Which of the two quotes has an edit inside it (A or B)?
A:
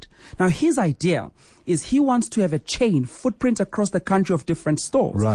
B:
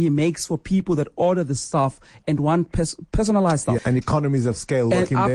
B